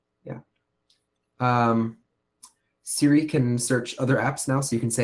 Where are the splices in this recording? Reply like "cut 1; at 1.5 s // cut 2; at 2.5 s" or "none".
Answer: none